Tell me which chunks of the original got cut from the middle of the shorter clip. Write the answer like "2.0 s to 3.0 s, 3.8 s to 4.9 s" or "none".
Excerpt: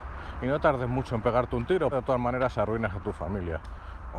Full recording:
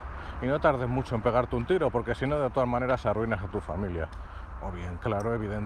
1.9 s to 2.4 s